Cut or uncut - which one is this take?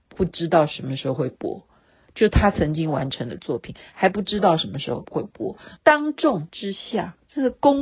cut